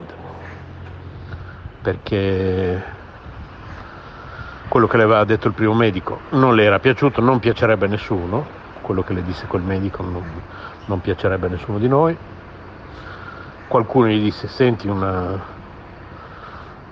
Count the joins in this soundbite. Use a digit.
0